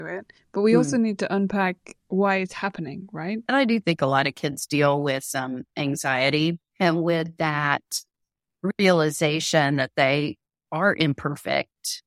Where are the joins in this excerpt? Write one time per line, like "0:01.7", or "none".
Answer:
0:03.5
0:06.7